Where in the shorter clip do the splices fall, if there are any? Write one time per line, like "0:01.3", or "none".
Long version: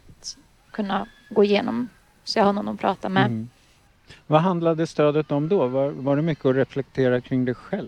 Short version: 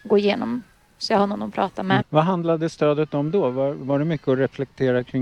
0:02.0